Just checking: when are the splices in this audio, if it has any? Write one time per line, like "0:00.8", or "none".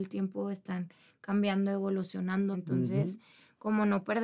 0:02.5